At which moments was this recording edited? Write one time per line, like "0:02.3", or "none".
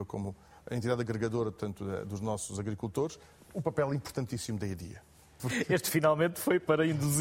0:05.4